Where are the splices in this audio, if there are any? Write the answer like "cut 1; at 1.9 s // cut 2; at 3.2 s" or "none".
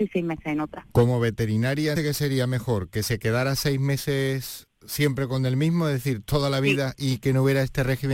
cut 1; at 1.9 s